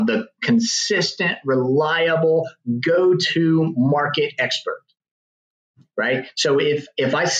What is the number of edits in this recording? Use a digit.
0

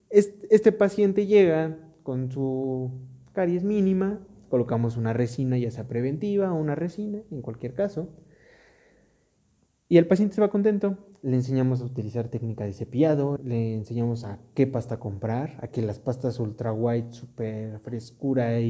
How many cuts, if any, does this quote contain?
1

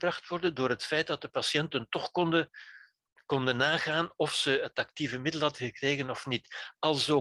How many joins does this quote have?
0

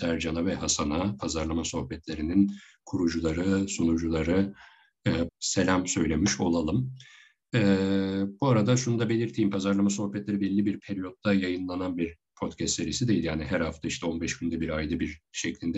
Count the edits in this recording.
1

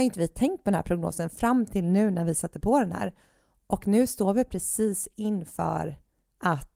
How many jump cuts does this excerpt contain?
0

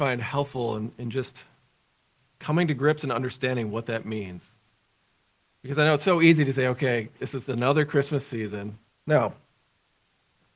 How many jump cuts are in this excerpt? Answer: 1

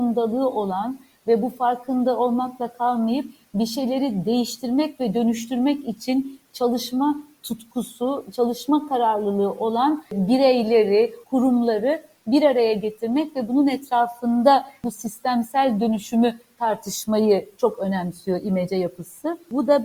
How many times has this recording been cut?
1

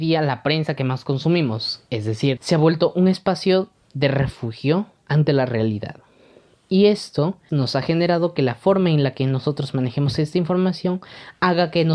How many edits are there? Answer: 2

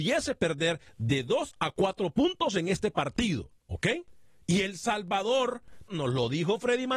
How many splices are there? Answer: 2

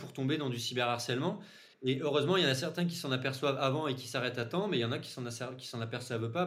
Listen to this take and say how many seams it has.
0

